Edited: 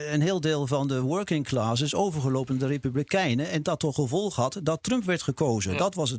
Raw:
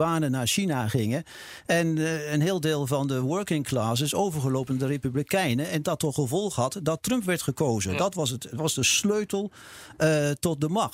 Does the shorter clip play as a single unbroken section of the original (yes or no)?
yes